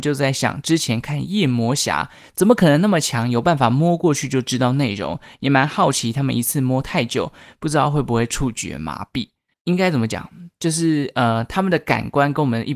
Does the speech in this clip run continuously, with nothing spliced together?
no; 1 cut; at 9.5 s

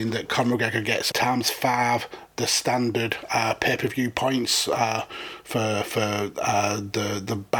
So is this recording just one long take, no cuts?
no; 1 cut; at 1.1 s

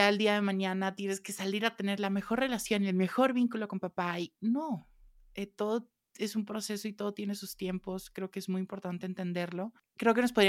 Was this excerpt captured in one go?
yes; 0 cuts

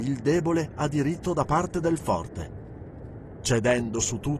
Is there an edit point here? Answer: no; 0 cuts

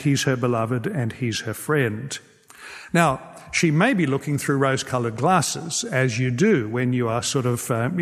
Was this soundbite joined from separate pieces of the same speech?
no; 0 cuts

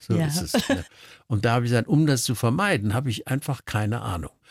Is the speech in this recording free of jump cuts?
yes; 0 cuts

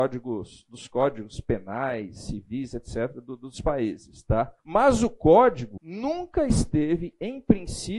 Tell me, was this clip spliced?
yes; 2 cuts; at 4.6 s, 5.8 s

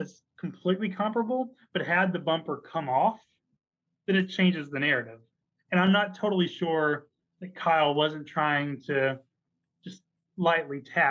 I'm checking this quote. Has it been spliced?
no; 0 cuts

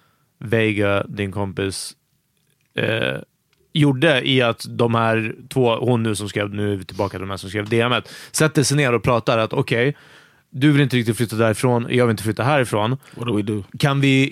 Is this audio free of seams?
yes; 0 cuts

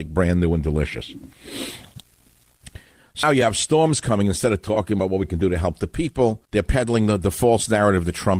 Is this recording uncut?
no; 2 cuts; at 3.2 s, 6.5 s

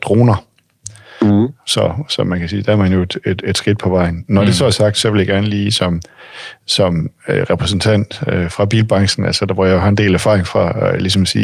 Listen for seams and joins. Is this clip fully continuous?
yes; 0 cuts

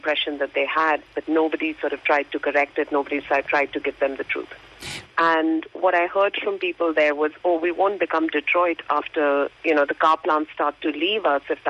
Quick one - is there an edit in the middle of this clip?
yes; 2 cuts; at 5.0 s, 9.5 s

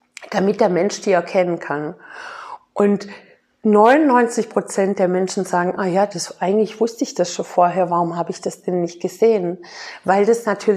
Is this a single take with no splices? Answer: yes; 0 cuts

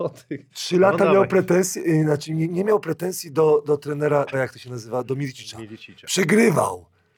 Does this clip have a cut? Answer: yes; 1 cut; at 4.3 s

